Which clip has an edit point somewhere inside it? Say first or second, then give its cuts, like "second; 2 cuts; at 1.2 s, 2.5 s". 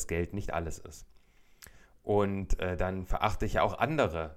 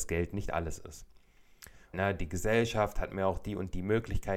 second; 1 cut; at 1.9 s